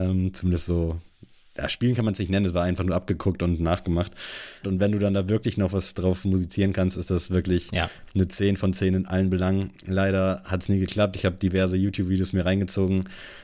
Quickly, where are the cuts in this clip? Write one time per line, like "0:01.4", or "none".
0:04.6